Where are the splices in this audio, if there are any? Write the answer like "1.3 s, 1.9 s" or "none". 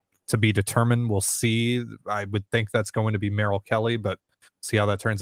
none